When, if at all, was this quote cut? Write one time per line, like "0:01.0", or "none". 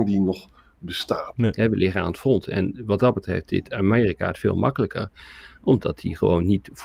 0:01.3

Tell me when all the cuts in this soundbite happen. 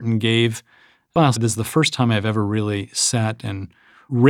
0:01.3

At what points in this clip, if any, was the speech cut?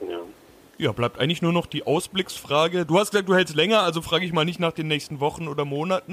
none

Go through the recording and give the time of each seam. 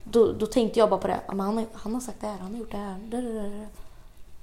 none

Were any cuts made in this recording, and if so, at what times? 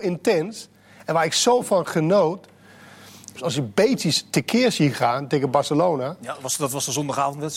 0:03.4

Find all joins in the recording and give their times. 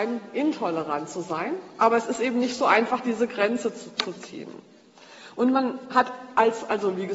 none

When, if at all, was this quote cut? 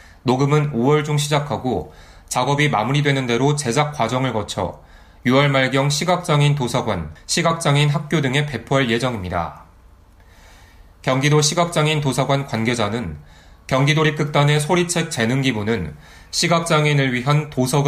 0:07.2

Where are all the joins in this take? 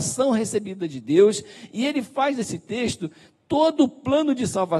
none

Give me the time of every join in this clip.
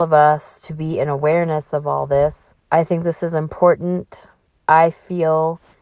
0:02.6

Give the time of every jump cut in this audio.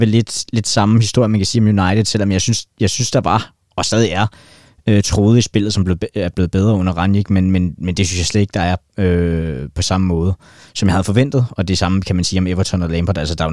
none

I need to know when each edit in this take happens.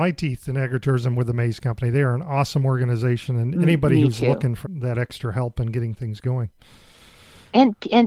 0:03.5
0:04.6

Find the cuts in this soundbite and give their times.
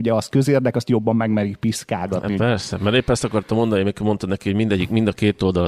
none

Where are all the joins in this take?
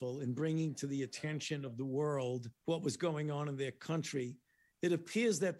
0:02.6

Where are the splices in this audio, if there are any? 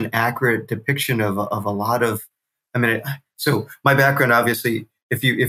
none

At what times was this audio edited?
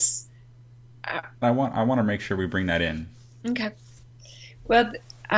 0:01.4

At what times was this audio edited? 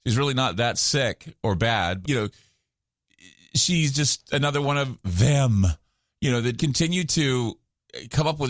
0:02.0
0:06.6

